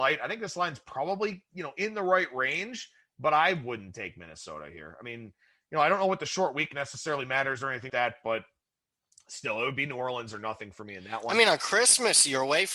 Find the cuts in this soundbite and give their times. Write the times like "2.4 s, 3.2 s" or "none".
7.9 s